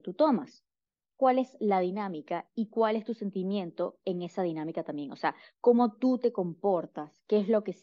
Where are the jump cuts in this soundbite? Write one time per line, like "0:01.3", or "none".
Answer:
0:01.0